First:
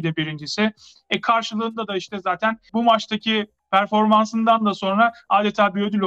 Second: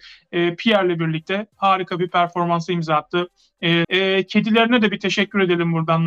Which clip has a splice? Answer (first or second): second